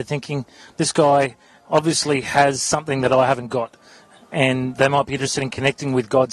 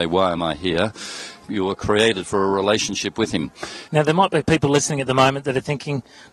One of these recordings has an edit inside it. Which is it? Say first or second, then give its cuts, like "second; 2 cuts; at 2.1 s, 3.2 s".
second; 2 cuts; at 1.4 s, 3.9 s